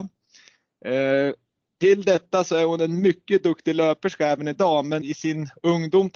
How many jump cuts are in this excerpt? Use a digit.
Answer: 1